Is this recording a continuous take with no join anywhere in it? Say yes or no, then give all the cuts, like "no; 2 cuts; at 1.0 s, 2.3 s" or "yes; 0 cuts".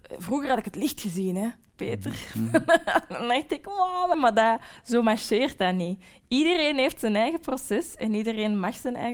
no; 1 cut; at 4.1 s